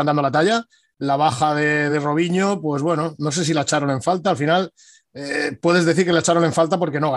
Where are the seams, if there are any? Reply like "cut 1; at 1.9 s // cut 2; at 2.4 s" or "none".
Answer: none